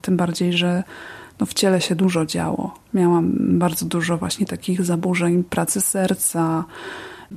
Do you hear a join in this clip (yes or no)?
no